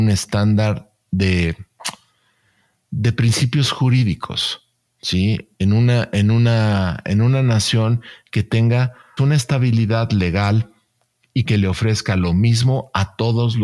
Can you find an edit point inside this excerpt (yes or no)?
yes